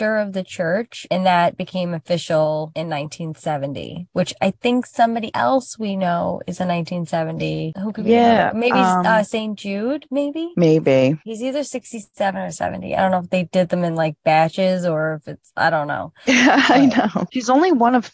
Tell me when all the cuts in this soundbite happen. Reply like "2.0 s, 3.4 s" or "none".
none